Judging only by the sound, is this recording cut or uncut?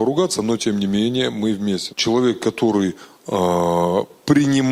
cut